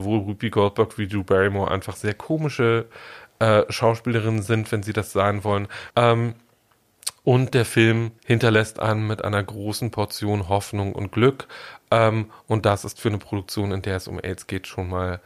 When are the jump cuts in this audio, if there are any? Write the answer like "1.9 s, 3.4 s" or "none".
5.9 s, 8.2 s